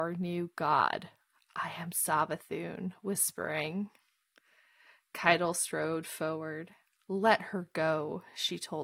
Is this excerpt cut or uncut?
uncut